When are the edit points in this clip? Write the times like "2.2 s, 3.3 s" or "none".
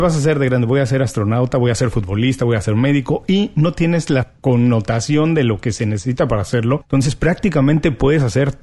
none